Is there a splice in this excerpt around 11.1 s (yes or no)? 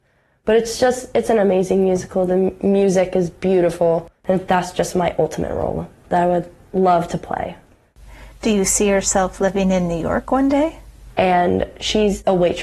yes